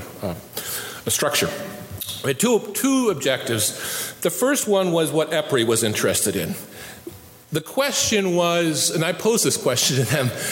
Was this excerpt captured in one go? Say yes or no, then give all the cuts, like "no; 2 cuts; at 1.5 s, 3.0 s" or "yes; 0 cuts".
yes; 0 cuts